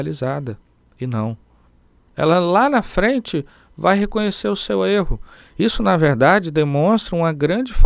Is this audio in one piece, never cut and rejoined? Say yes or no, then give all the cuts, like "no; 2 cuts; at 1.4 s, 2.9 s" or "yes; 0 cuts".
no; 1 cut; at 2.1 s